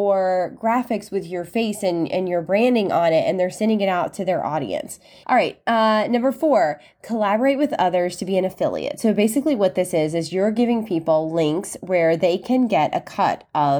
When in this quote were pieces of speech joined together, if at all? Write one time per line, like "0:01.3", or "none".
0:05.2